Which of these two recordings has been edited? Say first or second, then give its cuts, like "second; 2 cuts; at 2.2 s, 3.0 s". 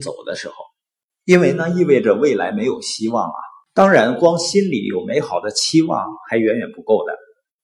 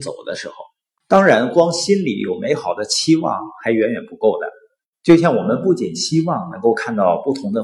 second; 1 cut; at 1.0 s